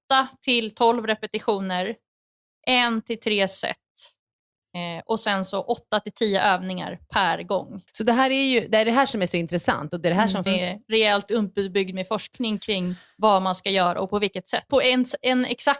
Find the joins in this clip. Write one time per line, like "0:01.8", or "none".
0:07.9
0:10.5
0:14.7